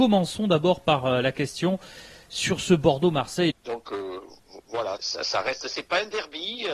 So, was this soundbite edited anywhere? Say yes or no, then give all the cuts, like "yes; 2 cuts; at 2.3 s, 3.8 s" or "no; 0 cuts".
yes; 2 cuts; at 3.5 s, 5.0 s